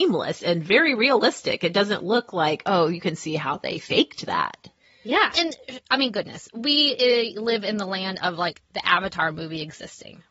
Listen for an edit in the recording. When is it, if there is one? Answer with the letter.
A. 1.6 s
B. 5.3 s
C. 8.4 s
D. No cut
B